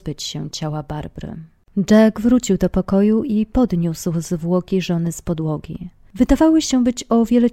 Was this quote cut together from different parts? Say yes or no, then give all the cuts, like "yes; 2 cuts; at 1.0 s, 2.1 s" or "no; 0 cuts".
no; 0 cuts